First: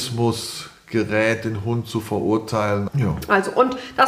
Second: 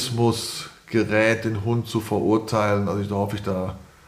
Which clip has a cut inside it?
first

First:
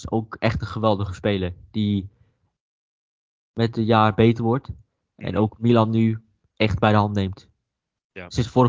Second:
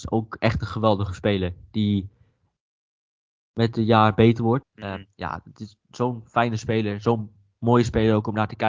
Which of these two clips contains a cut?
second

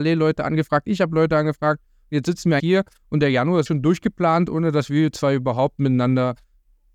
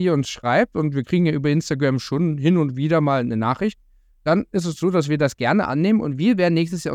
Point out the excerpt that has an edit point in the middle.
first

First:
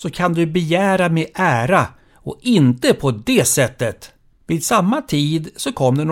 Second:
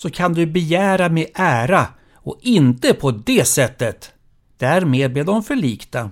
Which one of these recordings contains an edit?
first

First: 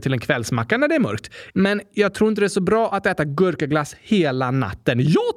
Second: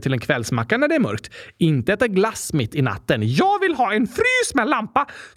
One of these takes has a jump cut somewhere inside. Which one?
first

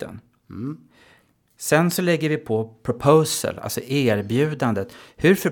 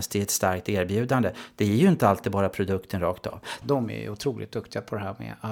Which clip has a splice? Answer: second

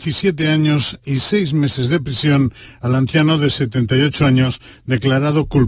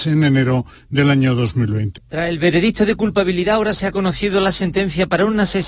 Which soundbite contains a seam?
second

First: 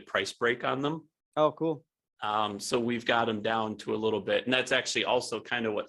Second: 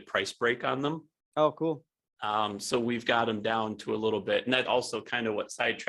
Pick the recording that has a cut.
second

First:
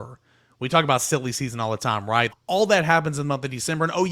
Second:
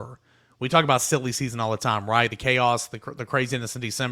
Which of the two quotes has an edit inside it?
first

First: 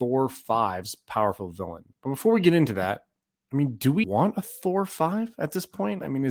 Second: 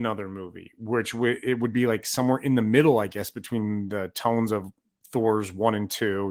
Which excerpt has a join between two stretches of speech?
first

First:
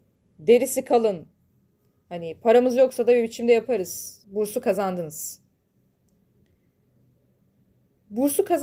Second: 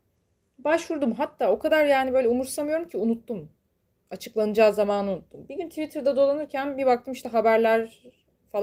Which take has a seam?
first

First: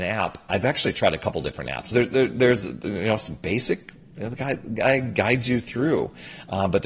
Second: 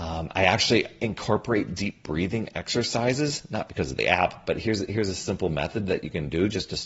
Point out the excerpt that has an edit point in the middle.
first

